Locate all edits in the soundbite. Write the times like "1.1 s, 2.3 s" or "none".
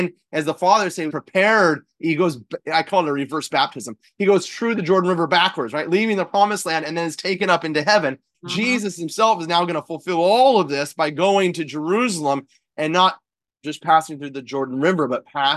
1.1 s, 8.3 s